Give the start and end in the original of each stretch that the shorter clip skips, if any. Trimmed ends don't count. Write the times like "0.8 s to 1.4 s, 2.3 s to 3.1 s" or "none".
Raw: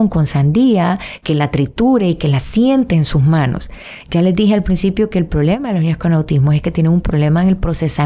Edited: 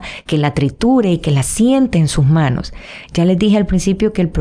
none